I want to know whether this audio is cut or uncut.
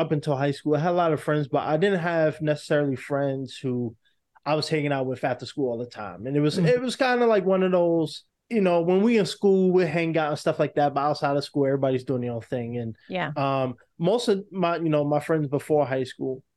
uncut